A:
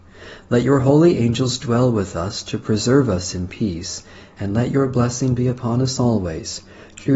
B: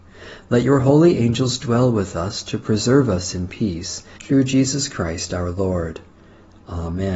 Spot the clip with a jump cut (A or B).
B